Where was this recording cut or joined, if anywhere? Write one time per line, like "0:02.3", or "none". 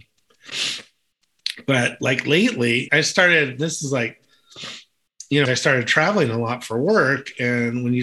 0:02.9
0:05.4